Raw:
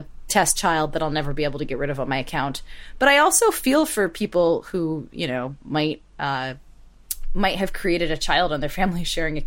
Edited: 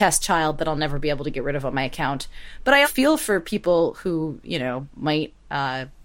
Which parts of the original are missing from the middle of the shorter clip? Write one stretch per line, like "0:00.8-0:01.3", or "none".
0:03.2-0:03.5